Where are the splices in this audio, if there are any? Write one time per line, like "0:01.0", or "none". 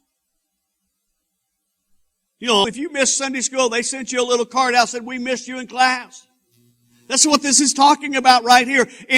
0:02.6